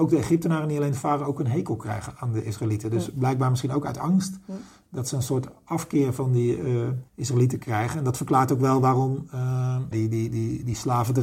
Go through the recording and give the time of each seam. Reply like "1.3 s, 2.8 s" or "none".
7.1 s, 9.9 s